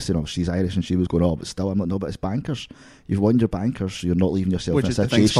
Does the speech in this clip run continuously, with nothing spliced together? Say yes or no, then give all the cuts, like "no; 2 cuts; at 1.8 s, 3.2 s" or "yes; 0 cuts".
yes; 0 cuts